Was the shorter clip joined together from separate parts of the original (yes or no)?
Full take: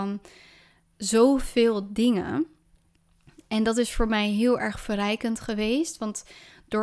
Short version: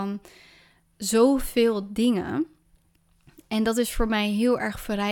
no